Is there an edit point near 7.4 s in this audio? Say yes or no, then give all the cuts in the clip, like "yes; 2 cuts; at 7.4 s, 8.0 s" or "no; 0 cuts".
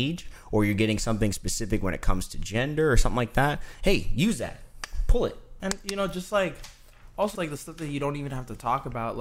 yes; 2 cuts; at 5.6 s, 7.4 s